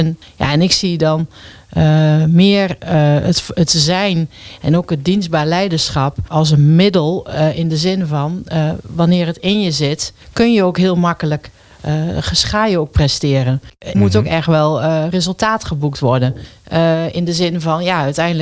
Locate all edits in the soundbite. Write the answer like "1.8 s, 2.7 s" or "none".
13.9 s